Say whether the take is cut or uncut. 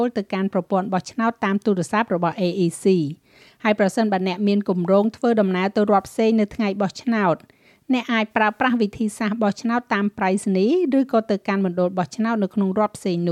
uncut